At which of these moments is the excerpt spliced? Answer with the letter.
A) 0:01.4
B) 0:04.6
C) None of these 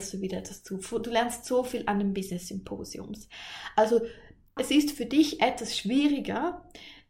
B